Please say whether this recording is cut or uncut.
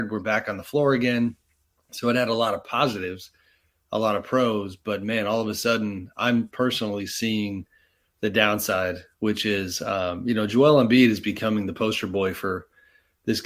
uncut